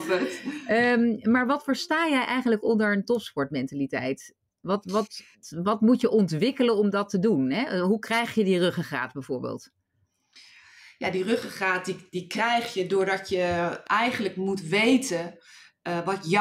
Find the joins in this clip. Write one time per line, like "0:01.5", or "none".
none